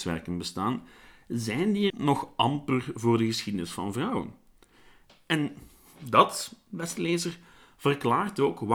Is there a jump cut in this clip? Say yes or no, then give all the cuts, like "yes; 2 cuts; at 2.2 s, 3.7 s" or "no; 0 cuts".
yes; 2 cuts; at 1.9 s, 5.1 s